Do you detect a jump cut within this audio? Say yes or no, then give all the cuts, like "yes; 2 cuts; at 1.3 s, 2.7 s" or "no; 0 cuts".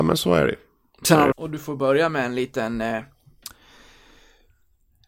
yes; 1 cut; at 1.3 s